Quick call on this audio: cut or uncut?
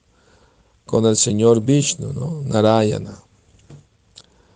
uncut